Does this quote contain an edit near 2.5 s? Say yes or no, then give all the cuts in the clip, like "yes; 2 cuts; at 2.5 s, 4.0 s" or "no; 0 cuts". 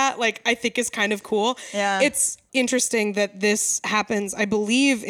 yes; 1 cut; at 2.5 s